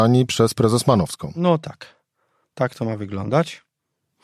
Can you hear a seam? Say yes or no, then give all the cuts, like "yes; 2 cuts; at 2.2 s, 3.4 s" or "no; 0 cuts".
no; 0 cuts